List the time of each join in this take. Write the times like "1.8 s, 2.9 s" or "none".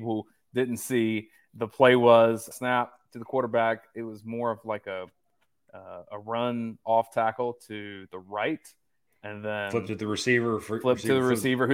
2.5 s